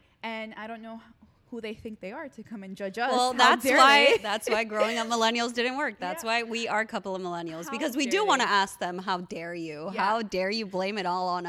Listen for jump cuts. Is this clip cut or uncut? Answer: uncut